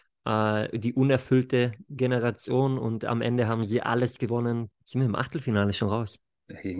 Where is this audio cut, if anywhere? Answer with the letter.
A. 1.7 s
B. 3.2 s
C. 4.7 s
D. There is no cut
C